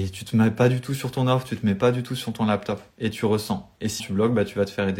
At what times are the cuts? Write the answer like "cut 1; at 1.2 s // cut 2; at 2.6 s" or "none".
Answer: cut 1; at 2.9 s // cut 2; at 4.0 s